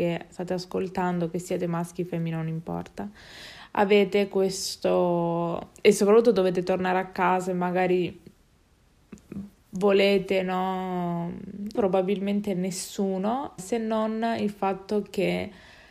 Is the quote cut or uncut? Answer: cut